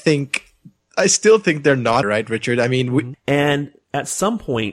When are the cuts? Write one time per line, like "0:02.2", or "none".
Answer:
0:02.0
0:03.1